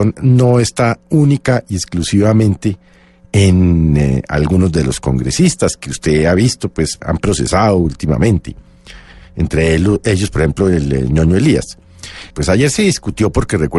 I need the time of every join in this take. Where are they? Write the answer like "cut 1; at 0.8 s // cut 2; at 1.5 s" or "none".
cut 1; at 7.0 s // cut 2; at 12.3 s